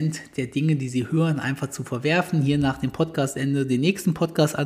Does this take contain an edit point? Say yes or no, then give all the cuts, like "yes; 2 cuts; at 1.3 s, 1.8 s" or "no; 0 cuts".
no; 0 cuts